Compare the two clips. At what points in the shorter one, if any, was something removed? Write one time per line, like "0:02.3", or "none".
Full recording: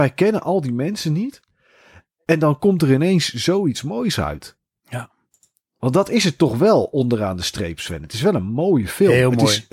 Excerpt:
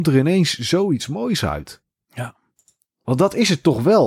none